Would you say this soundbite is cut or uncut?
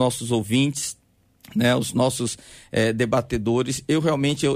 uncut